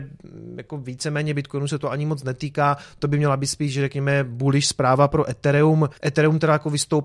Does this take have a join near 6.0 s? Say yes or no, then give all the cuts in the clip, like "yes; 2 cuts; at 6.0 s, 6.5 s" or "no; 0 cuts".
yes; 1 cut; at 6.0 s